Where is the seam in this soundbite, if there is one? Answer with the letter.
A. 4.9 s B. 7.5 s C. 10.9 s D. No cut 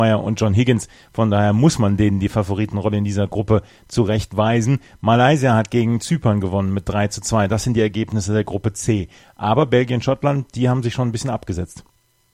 D